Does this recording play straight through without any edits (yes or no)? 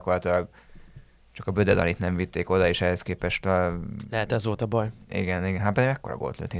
yes